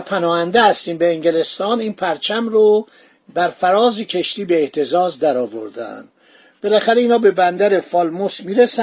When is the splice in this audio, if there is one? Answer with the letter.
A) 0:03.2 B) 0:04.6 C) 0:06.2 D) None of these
D